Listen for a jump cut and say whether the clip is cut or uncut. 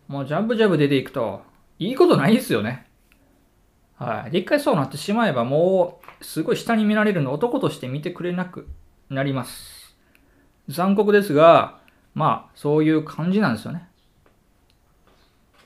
uncut